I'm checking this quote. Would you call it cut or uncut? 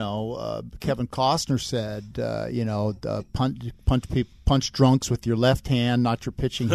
uncut